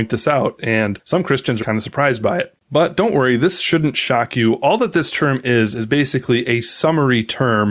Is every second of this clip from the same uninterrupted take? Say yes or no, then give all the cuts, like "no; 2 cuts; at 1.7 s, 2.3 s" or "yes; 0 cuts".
no; 1 cut; at 1.6 s